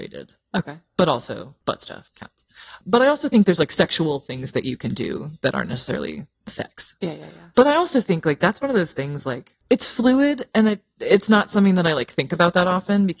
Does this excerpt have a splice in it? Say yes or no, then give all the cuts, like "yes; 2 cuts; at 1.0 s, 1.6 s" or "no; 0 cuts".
no; 0 cuts